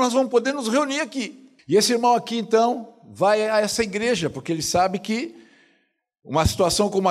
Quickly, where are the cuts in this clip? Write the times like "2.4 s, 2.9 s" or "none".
1.6 s